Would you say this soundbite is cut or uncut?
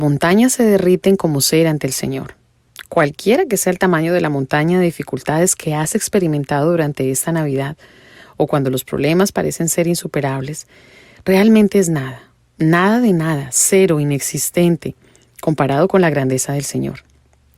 uncut